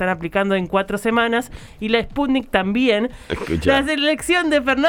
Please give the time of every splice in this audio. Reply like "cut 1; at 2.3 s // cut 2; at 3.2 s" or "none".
cut 1; at 3.3 s